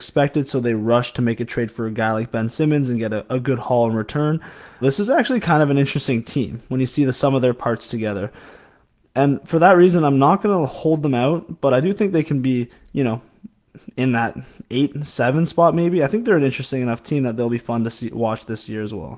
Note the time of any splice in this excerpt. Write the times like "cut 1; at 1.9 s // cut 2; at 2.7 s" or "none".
cut 1; at 4.8 s